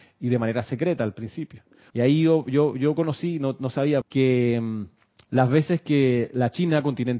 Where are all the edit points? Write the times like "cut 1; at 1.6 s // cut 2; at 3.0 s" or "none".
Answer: cut 1; at 1.9 s // cut 2; at 4.0 s

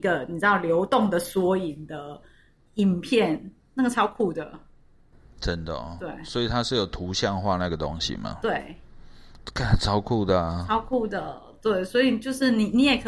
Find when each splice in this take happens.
none

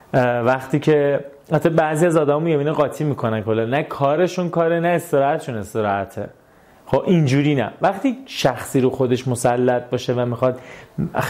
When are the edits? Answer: none

